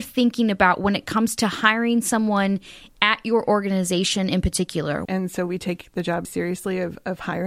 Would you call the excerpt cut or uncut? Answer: cut